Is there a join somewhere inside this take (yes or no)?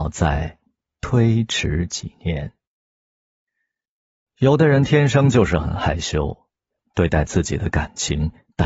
no